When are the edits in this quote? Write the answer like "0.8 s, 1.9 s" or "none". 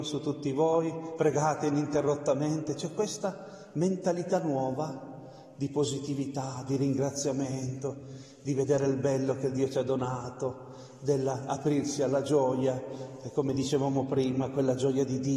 none